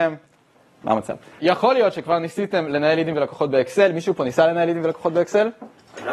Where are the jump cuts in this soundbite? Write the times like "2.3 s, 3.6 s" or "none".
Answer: 1.4 s